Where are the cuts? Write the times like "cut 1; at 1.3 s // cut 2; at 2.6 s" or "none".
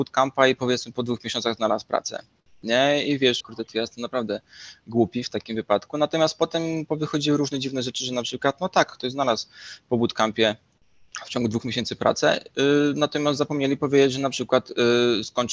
cut 1; at 3.4 s